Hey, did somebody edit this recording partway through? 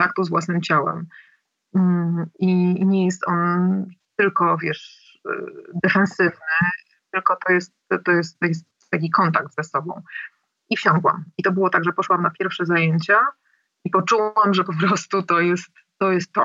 no; 0 cuts

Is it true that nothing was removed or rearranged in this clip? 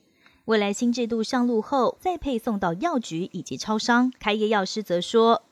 no; 2 cuts; at 1.9 s, 4.2 s

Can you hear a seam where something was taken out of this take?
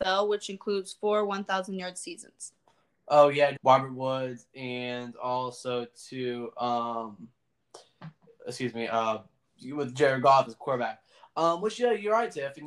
yes; 1 cut; at 3.6 s

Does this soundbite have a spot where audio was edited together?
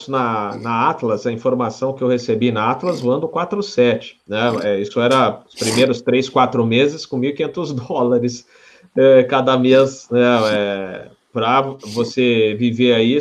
no; 0 cuts

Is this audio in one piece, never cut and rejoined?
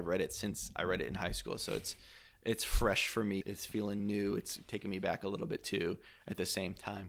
no; 1 cut; at 3.4 s

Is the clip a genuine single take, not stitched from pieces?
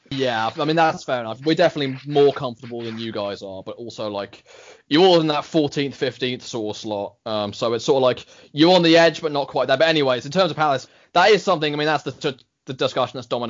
yes; 0 cuts

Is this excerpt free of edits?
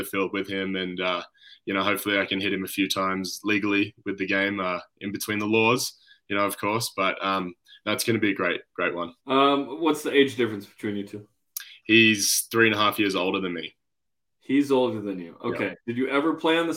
no; 1 cut; at 9.2 s

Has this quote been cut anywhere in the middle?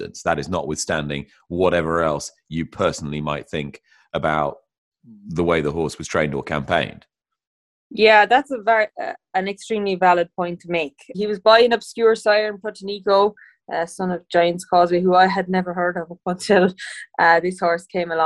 yes; 1 cut; at 11.1 s

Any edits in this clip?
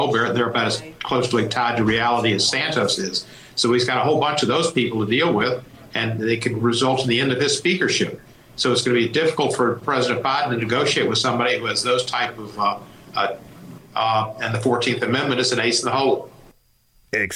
yes; 1 cut; at 13.8 s

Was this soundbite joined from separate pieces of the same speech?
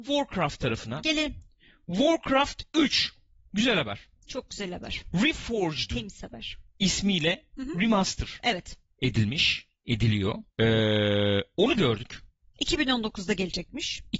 yes; 1 cut; at 10.5 s

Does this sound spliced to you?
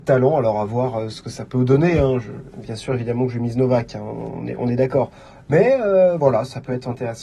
no; 0 cuts

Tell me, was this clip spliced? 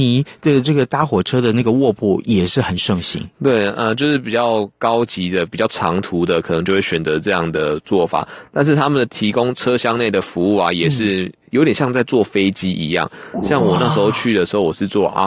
no; 0 cuts

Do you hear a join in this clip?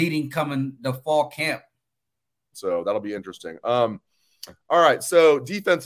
yes; 1 cut; at 2.5 s

